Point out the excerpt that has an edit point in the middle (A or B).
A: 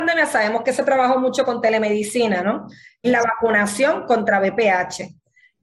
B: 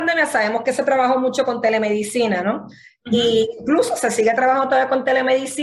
A